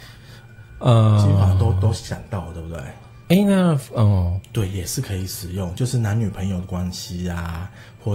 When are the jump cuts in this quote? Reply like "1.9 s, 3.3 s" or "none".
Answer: 3.2 s, 4.4 s